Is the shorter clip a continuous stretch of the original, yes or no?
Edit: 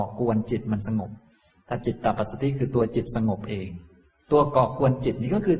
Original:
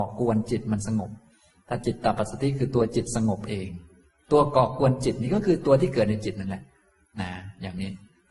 yes